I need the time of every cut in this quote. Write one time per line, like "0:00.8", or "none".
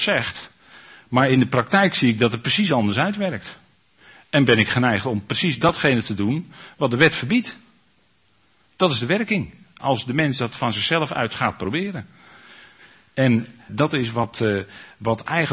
0:13.7